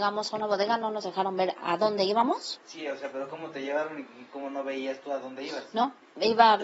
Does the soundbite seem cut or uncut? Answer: cut